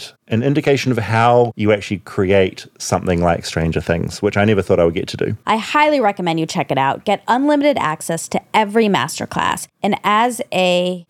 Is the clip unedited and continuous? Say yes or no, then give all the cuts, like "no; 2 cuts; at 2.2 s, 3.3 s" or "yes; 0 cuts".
no; 1 cut; at 5.4 s